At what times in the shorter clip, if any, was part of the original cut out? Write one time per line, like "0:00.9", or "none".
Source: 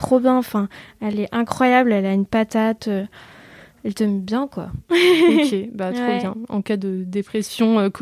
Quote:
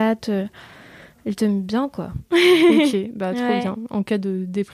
none